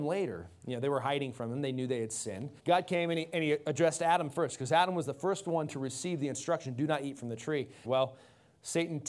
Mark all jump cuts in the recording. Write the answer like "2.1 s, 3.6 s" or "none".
2.6 s, 7.8 s

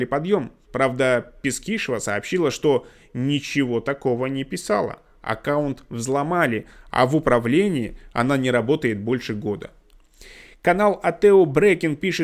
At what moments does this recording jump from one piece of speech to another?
none

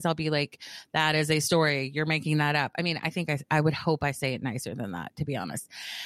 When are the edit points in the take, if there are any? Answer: none

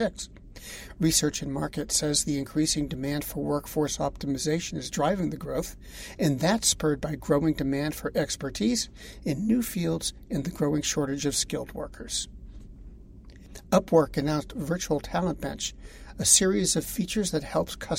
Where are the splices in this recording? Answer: none

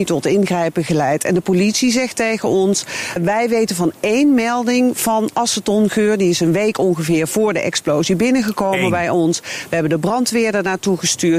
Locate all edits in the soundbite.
3.2 s

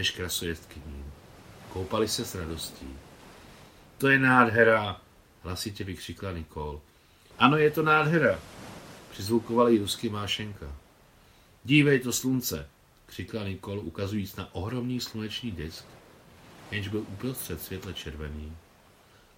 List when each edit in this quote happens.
7.3 s

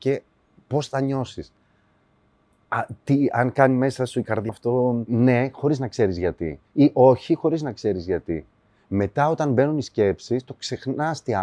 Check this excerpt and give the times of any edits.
4.5 s

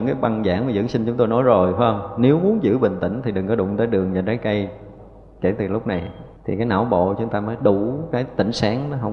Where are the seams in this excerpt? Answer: 6.4 s

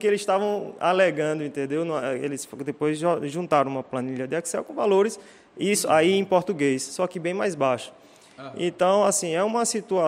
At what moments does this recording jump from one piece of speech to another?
none

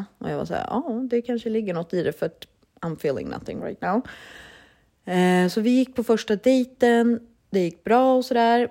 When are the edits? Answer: 7.4 s

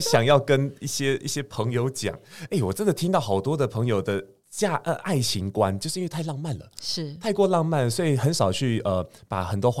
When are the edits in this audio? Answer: none

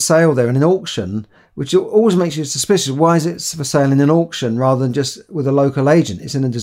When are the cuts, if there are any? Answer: none

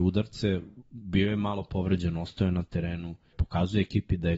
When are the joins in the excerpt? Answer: 3.3 s

